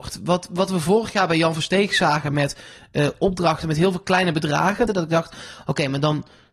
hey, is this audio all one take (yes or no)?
no